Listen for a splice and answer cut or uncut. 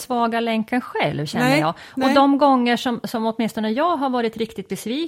uncut